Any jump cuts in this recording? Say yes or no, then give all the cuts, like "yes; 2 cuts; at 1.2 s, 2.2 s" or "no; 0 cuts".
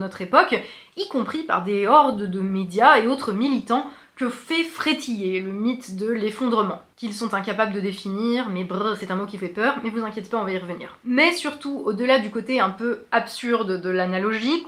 no; 0 cuts